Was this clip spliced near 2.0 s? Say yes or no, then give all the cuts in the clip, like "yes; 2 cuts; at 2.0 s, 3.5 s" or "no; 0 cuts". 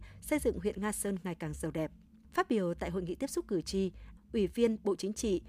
no; 1 cut; at 4.2 s